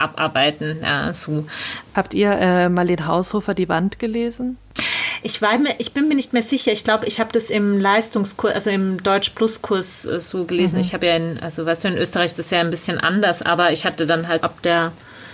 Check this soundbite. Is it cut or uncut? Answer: cut